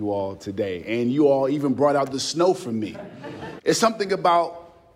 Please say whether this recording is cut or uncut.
cut